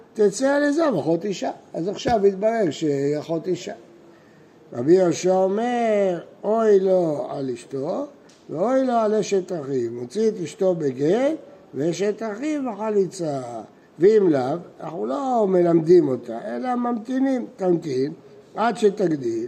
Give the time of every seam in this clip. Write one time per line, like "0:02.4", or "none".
0:13.8